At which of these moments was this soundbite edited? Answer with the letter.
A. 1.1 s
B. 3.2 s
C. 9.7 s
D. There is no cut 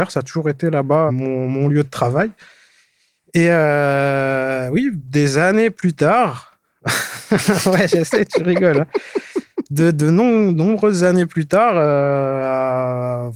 A